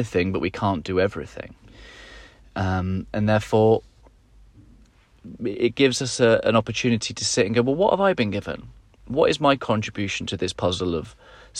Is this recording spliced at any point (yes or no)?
yes